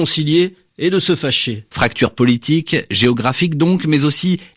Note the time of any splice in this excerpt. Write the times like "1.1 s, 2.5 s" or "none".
1.7 s